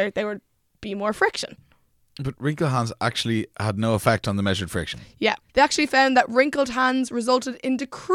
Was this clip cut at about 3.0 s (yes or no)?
no